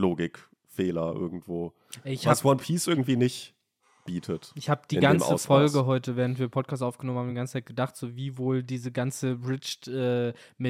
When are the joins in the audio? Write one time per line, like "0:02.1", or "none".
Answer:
none

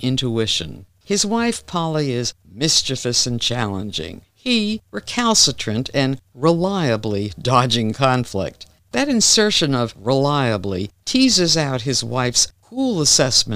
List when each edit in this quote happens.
none

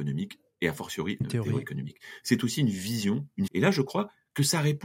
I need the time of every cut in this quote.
0:01.2
0:03.5

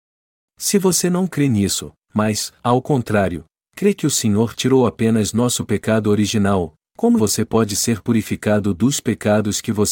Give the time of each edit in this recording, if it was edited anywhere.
0:07.2

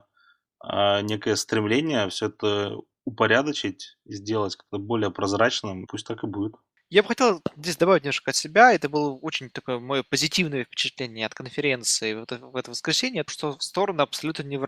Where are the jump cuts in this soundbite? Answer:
0:05.9
0:13.3

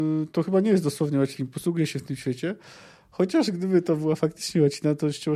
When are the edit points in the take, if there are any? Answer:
0:01.3

